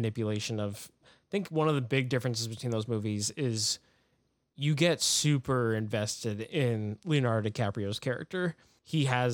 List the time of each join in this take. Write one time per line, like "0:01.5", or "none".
0:01.0

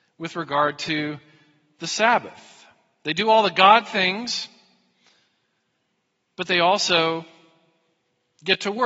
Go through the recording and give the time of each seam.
none

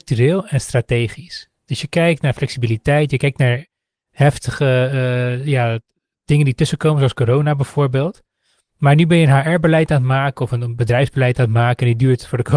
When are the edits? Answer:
none

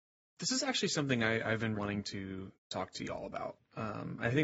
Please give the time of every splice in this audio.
0:01.7

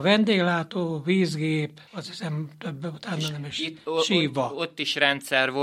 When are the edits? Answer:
0:01.9

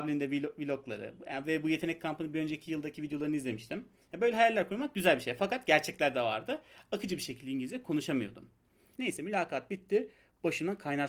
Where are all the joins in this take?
0:08.9

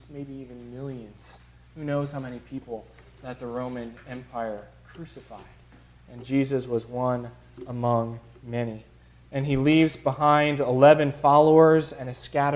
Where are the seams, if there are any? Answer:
none

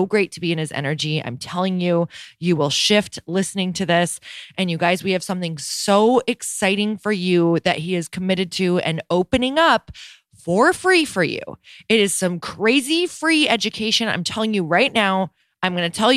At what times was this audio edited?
none

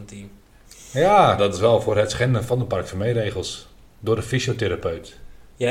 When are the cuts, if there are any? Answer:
0:01.4

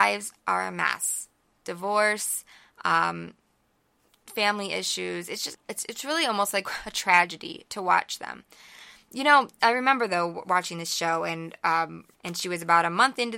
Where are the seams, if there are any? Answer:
0:05.5
0:12.1

